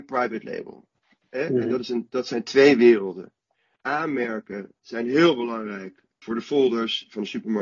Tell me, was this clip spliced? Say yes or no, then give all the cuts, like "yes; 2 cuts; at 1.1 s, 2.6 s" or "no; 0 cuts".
no; 0 cuts